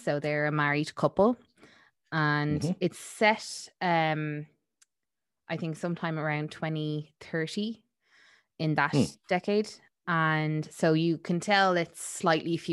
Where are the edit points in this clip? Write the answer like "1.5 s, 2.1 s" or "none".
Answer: none